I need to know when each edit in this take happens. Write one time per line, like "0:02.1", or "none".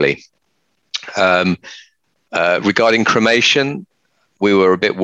none